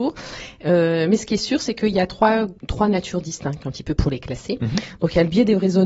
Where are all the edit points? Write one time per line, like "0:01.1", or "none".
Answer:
0:02.6
0:04.0